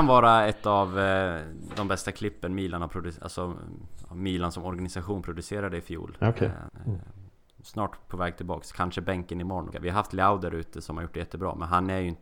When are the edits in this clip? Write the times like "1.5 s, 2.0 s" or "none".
6.7 s, 9.7 s